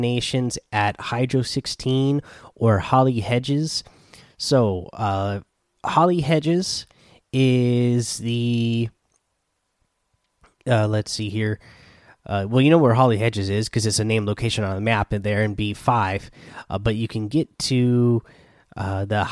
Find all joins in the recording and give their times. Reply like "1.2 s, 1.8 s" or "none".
none